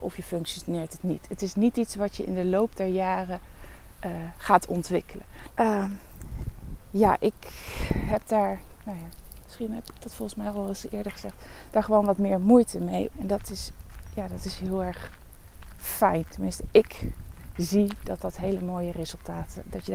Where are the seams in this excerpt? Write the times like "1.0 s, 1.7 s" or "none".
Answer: 5.5 s, 13.1 s